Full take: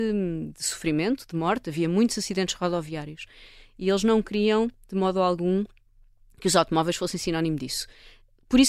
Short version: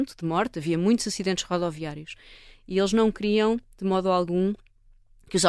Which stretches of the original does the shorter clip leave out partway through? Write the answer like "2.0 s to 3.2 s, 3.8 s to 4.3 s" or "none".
none